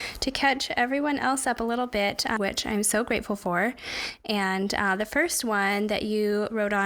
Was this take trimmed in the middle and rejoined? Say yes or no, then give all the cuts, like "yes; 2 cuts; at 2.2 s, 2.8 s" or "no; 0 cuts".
yes; 1 cut; at 2.4 s